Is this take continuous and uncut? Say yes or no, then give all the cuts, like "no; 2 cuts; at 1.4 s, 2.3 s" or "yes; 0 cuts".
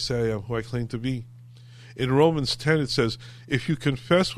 yes; 0 cuts